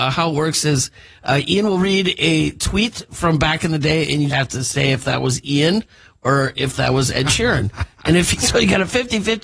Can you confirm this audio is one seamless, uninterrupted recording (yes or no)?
no